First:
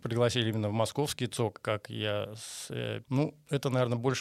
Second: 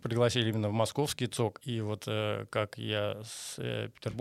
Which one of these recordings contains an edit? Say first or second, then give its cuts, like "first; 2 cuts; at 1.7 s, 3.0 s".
first; 2 cuts; at 1.6 s, 3.0 s